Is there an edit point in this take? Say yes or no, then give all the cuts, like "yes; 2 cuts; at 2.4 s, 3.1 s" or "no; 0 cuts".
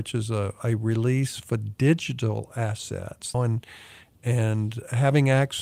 yes; 1 cut; at 3.3 s